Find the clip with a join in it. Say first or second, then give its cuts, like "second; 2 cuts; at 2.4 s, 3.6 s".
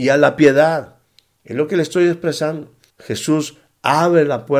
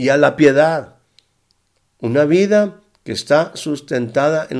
first; 2 cuts; at 1.4 s, 2.9 s